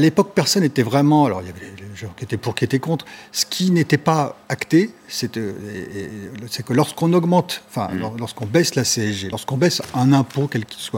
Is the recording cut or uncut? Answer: uncut